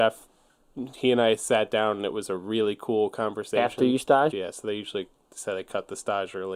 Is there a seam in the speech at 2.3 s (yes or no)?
no